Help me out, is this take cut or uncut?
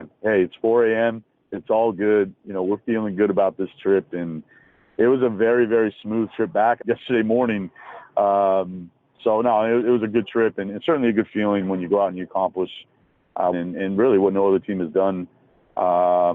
cut